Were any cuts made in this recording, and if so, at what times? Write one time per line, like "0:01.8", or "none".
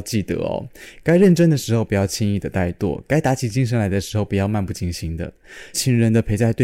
0:05.7